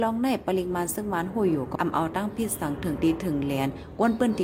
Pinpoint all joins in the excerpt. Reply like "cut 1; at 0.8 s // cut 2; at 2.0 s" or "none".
cut 1; at 1.8 s